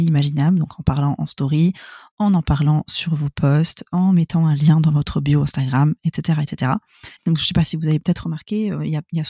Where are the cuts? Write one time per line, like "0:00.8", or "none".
0:07.2